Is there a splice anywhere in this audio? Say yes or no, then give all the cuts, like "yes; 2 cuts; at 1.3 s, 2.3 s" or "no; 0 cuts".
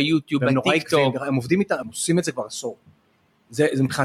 yes; 1 cut; at 1.8 s